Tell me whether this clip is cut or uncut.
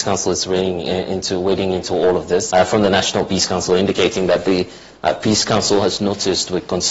cut